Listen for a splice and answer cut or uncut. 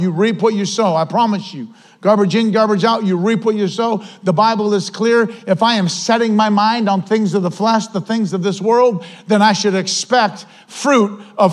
uncut